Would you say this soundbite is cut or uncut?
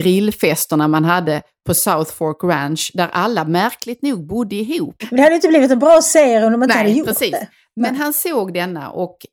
cut